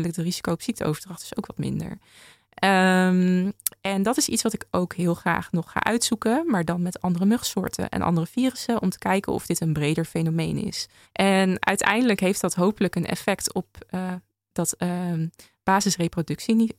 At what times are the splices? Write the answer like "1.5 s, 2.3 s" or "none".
11.1 s